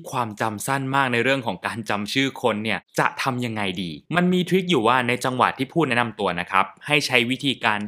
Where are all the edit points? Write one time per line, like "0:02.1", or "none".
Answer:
0:04.1